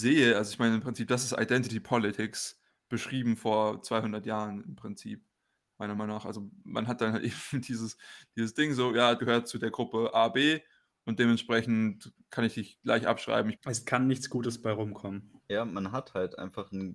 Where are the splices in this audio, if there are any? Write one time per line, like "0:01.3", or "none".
0:09.2
0:13.5
0:15.4